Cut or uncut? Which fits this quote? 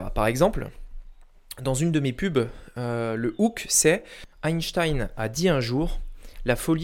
cut